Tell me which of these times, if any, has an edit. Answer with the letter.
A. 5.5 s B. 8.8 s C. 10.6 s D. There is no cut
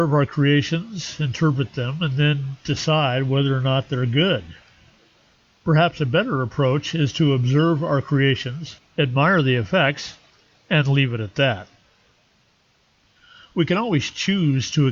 B